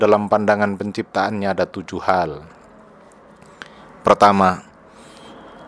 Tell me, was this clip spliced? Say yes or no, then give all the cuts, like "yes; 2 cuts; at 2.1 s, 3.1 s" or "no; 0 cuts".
no; 0 cuts